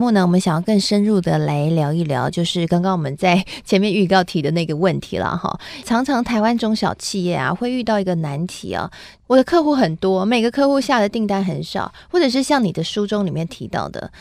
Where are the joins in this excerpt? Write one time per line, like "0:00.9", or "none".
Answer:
none